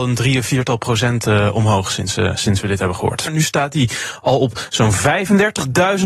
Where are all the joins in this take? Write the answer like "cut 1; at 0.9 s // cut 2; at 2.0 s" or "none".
cut 1; at 3.3 s